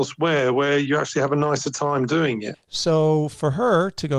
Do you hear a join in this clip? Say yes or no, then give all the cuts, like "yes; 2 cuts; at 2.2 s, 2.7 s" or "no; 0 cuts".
yes; 1 cut; at 2.5 s